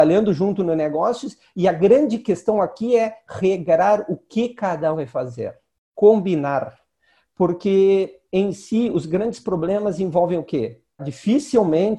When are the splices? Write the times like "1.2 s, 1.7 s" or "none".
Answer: 4.9 s, 11.0 s